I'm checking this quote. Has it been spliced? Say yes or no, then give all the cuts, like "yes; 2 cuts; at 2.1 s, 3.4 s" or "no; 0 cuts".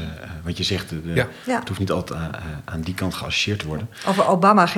no; 0 cuts